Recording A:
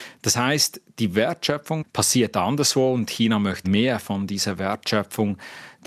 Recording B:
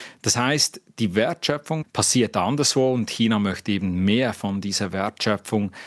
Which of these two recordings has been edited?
A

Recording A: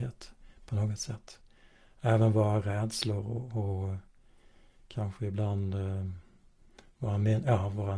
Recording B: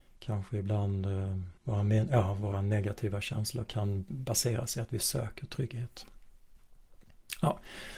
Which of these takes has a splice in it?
B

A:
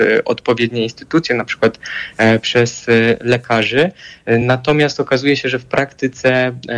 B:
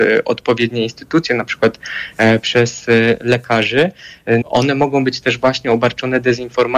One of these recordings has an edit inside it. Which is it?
B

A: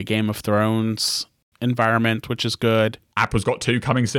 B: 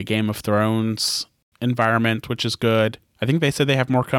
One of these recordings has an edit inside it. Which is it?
A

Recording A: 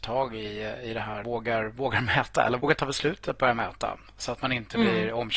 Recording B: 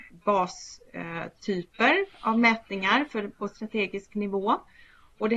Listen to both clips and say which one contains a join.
A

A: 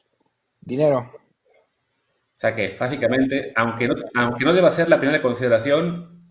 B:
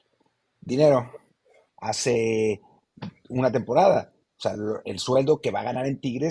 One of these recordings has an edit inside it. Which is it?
B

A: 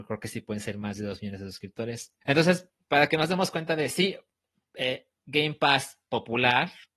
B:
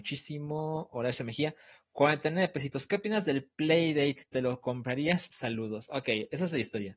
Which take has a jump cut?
A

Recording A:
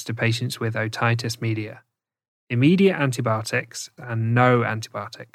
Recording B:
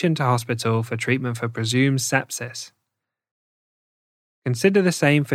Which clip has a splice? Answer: A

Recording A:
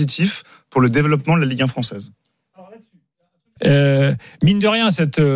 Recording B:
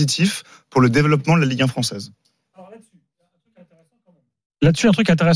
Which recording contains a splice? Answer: A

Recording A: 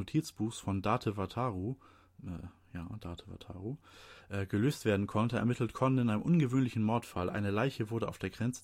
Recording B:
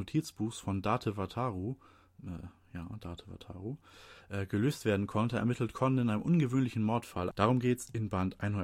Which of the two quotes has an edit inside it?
B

